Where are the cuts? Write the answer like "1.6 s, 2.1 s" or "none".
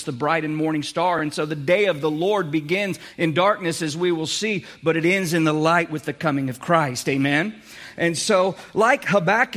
none